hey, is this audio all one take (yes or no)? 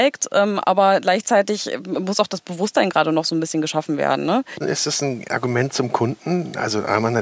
no